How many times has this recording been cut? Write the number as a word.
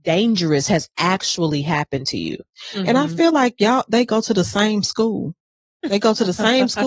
zero